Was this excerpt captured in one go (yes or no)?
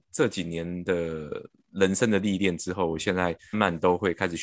no